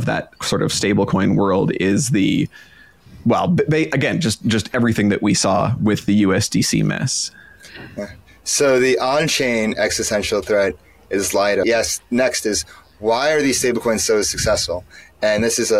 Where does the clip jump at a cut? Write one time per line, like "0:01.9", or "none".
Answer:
0:11.6